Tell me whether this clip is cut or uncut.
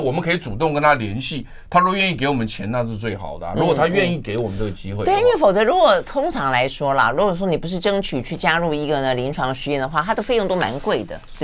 uncut